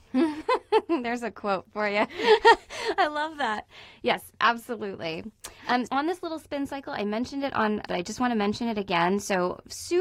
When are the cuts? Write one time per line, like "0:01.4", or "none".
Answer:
0:05.9
0:07.9